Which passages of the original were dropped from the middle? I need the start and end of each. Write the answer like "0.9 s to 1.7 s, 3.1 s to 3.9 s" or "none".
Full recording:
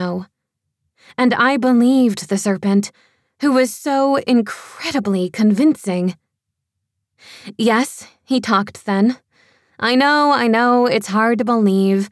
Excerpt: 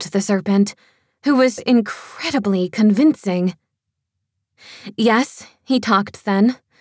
3.7 s to 4.2 s

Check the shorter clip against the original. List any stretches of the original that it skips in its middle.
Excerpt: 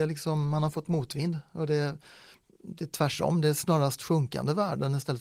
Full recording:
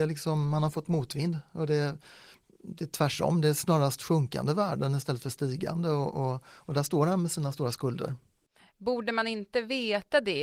none

